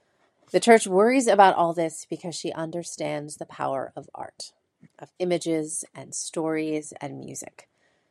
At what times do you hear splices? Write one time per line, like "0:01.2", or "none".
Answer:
none